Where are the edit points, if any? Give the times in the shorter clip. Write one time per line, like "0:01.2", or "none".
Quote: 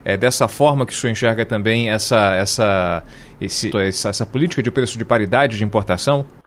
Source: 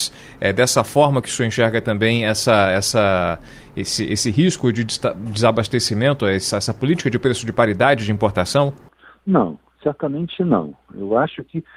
0:03.7